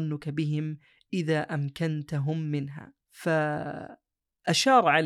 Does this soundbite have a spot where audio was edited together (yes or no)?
yes